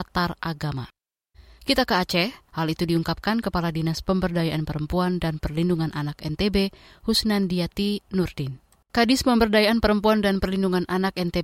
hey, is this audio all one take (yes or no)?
no